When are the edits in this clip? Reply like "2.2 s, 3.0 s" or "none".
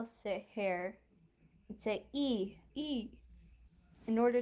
2.7 s